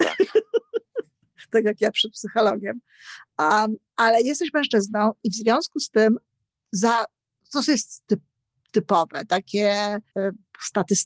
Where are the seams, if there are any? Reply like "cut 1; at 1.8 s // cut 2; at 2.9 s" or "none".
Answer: cut 1; at 10.1 s